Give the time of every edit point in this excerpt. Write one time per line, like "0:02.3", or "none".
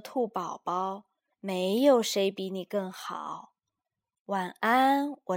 0:01.3